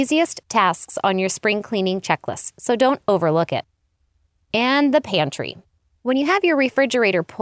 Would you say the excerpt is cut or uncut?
cut